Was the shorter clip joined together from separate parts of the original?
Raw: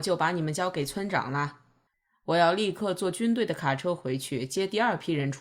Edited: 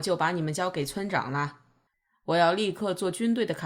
no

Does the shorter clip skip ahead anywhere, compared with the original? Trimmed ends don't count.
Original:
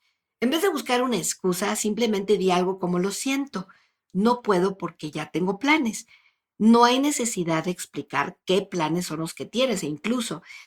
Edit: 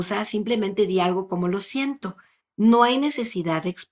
yes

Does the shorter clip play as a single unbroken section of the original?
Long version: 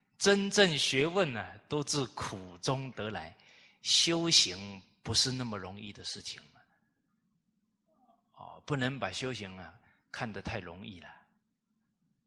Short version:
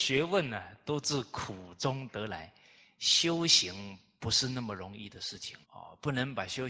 no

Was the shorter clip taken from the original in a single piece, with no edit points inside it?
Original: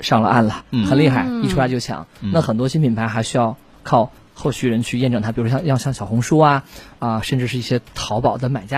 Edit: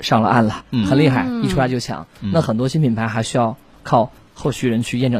yes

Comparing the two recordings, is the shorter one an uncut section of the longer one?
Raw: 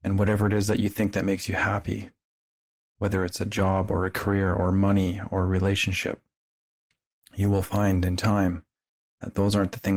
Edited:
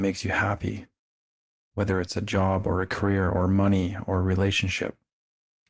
yes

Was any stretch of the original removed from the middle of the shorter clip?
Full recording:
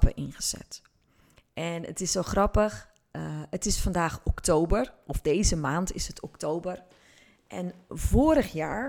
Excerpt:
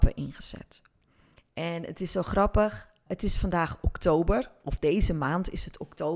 yes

